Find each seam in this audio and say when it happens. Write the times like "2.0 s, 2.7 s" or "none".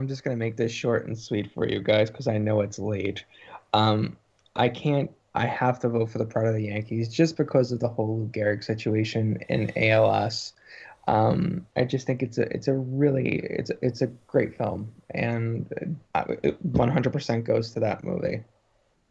11.7 s, 16.1 s